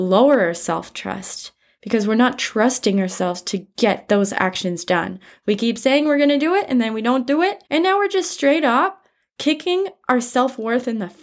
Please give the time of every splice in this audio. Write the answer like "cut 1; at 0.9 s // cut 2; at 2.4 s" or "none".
cut 1; at 7.7 s